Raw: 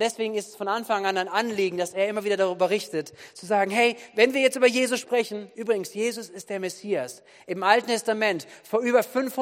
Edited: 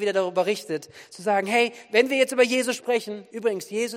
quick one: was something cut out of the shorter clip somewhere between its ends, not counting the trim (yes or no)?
no